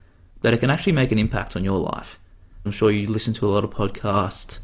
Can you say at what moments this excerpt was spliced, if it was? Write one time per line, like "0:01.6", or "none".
0:02.7